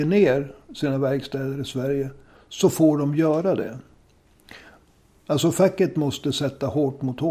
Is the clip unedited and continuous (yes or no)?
yes